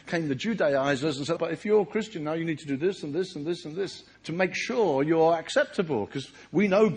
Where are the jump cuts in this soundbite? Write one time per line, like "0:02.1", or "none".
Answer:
0:01.4
0:04.1